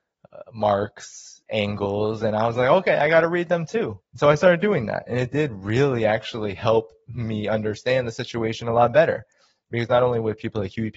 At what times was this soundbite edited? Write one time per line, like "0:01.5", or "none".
0:04.0